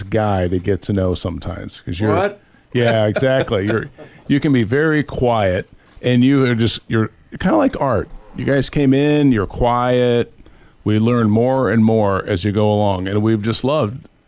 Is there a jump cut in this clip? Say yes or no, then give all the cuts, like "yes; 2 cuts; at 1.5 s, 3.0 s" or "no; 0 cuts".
no; 0 cuts